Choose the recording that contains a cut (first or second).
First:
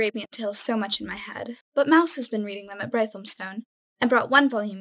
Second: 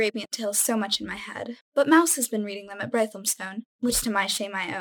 second